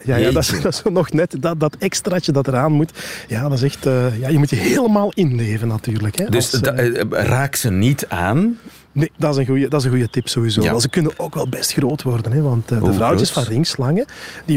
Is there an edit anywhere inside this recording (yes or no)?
no